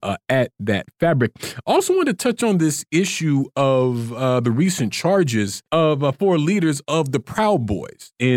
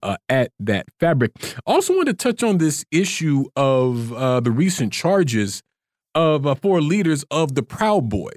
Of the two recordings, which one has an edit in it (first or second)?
first